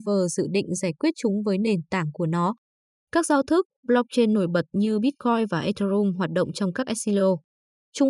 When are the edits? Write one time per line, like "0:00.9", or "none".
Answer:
0:03.0